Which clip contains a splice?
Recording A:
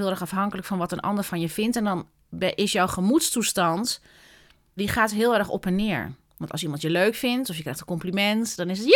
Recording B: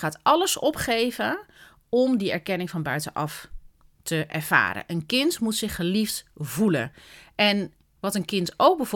A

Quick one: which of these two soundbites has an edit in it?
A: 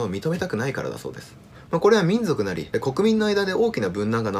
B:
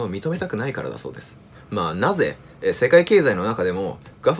A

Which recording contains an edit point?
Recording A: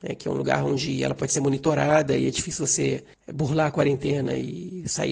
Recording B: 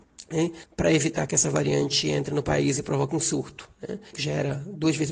B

